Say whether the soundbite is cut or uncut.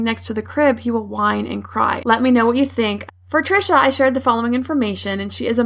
cut